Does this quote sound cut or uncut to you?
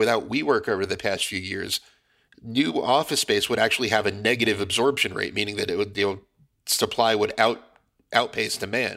uncut